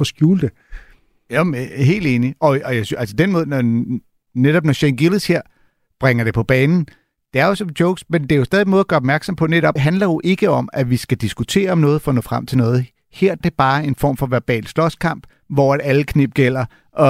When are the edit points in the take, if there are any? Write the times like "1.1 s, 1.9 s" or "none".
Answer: 9.8 s, 13.4 s